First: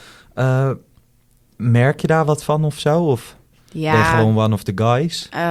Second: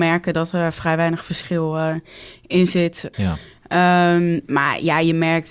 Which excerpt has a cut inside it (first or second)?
second